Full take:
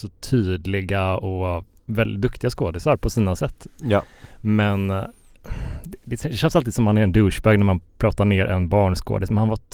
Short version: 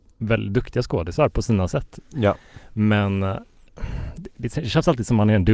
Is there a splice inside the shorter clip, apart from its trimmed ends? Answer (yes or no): no